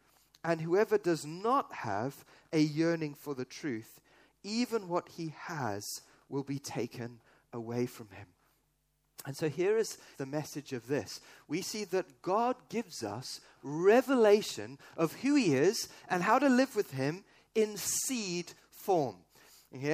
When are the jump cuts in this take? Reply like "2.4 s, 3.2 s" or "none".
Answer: 10.1 s